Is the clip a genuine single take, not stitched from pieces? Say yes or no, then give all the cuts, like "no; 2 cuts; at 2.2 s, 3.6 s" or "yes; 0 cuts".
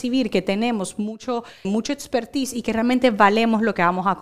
no; 1 cut; at 1.6 s